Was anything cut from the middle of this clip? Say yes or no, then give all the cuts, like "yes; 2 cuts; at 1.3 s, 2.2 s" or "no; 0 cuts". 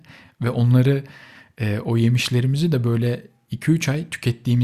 no; 0 cuts